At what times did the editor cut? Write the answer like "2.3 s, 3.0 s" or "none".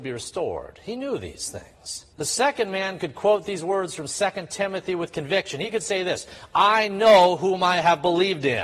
2.1 s

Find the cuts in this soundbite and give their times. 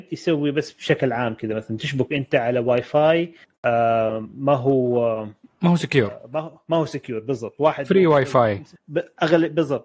none

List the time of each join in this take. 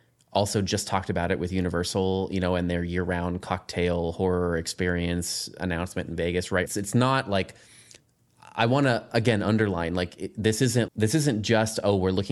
6.7 s, 10.9 s

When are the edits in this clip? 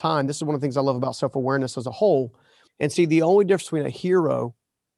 2.7 s

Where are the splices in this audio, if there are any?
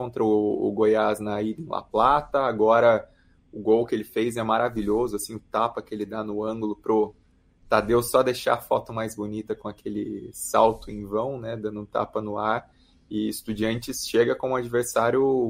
none

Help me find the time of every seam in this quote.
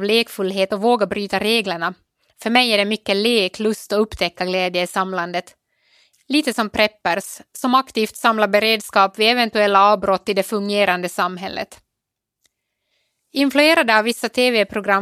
6.1 s

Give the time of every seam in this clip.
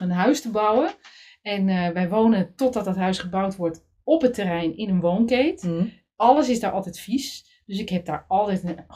none

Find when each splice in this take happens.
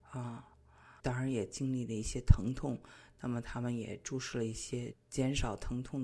1.0 s

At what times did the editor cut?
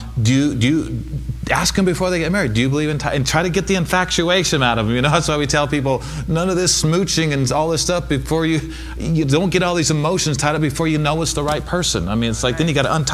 none

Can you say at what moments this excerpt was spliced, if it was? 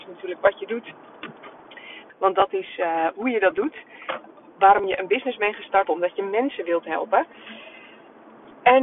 2.1 s, 5.9 s

